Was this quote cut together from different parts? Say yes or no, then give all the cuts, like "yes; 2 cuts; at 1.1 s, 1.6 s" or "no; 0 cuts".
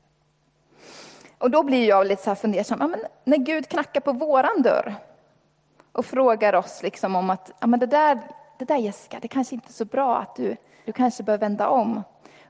yes; 1 cut; at 10.9 s